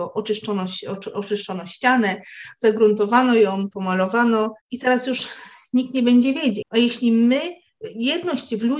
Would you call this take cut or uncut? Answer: cut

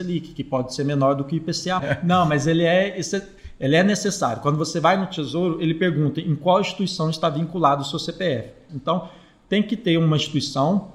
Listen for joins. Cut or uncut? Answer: cut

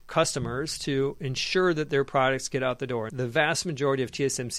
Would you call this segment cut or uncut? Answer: cut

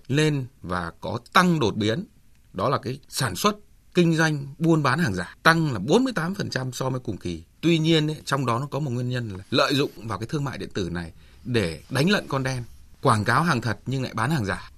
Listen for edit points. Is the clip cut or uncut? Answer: cut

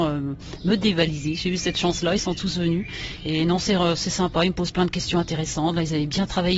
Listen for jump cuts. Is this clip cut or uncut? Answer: uncut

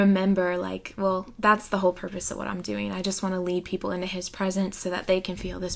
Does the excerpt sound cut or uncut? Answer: uncut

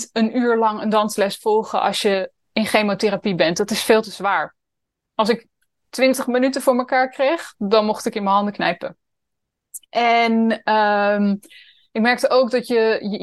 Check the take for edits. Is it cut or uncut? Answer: uncut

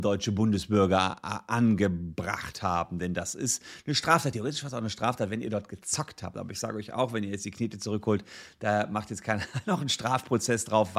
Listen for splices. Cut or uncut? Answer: uncut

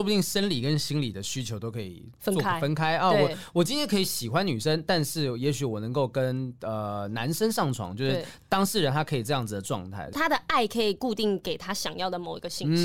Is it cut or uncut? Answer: uncut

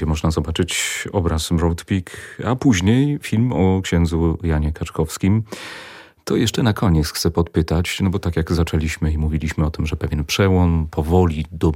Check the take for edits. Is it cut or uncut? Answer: uncut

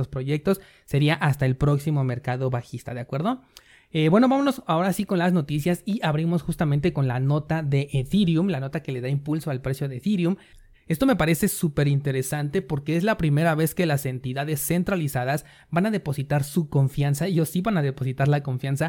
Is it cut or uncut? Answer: cut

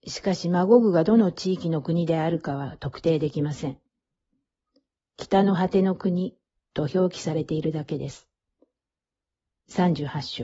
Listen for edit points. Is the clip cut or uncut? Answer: uncut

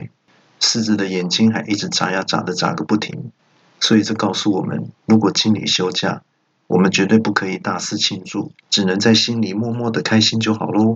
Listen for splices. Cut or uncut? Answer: cut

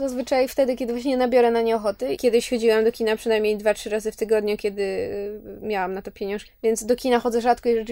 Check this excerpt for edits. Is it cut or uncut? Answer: cut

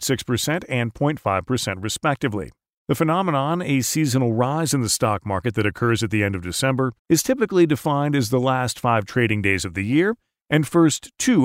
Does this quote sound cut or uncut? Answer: cut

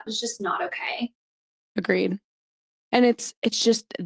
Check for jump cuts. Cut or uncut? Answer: uncut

